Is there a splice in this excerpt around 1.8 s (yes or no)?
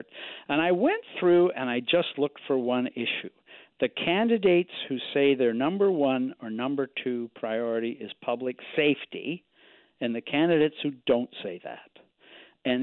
no